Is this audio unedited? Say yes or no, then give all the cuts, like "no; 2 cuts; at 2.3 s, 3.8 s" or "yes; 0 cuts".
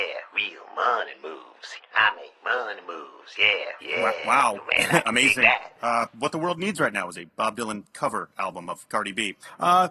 no; 1 cut; at 3.8 s